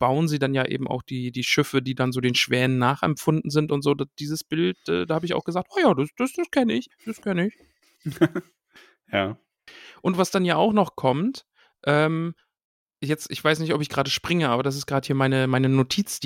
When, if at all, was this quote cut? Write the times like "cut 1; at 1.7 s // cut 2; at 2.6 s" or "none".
none